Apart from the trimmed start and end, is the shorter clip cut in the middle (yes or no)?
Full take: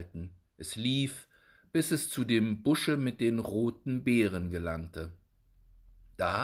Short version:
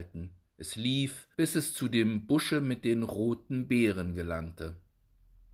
yes